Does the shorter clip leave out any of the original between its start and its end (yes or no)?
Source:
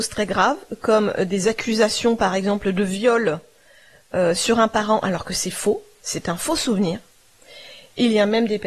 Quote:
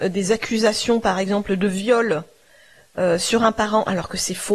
no